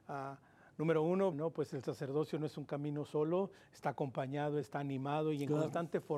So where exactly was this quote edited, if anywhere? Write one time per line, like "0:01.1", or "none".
0:01.3
0:04.6